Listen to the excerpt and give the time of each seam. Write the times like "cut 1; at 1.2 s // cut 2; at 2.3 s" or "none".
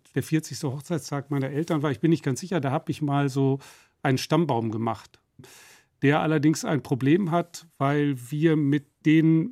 none